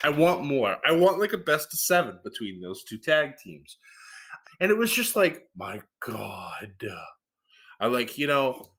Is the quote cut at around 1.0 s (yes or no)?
no